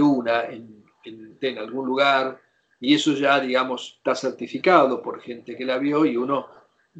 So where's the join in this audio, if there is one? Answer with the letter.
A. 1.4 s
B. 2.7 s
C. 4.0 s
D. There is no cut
A